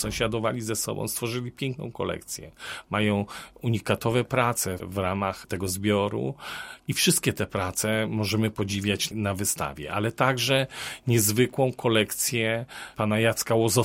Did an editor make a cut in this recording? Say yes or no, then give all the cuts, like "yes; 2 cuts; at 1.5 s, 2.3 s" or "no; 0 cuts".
no; 0 cuts